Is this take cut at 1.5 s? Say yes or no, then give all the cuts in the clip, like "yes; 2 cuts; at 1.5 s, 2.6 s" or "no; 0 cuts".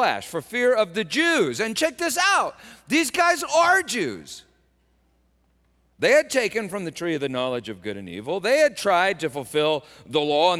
no; 0 cuts